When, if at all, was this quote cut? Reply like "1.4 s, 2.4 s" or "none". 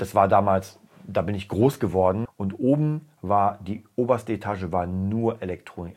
2.3 s